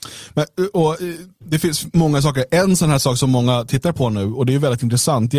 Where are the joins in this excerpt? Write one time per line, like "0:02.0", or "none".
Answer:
0:01.3